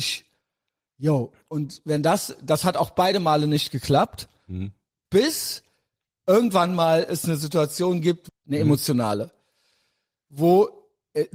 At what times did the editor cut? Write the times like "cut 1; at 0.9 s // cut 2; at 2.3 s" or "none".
cut 1; at 5.1 s // cut 2; at 8.3 s